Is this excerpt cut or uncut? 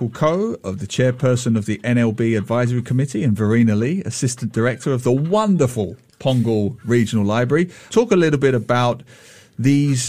cut